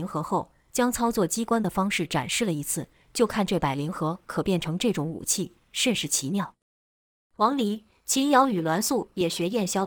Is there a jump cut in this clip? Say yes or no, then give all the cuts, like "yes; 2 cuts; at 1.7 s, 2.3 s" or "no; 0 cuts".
no; 0 cuts